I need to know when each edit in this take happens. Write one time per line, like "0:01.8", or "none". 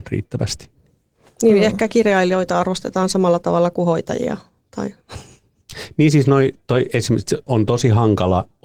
0:07.5